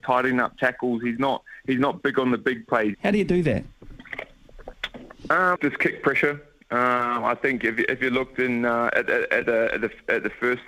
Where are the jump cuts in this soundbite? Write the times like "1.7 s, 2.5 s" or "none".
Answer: 2.9 s, 5.6 s